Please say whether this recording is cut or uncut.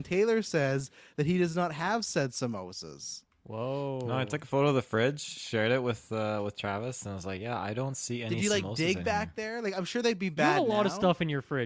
uncut